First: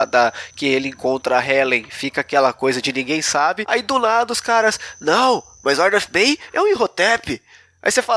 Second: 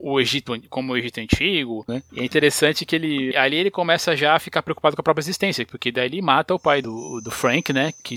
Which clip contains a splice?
second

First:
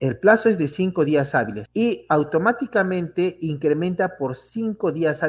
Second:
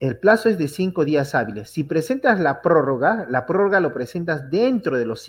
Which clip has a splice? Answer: first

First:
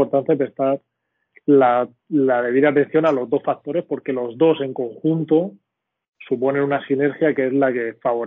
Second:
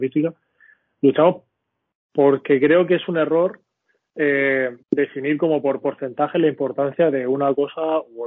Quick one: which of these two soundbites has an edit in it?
second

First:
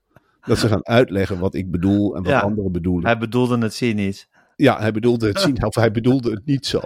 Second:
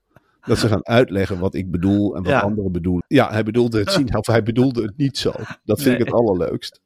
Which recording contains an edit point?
second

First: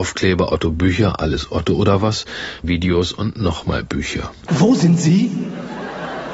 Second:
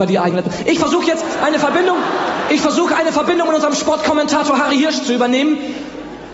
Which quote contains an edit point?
first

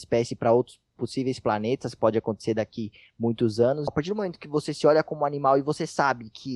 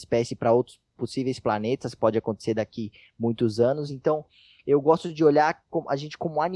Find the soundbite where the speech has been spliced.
first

